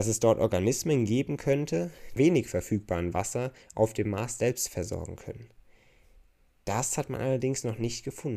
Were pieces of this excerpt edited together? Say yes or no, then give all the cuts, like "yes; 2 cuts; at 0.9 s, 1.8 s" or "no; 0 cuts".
yes; 1 cut; at 2.2 s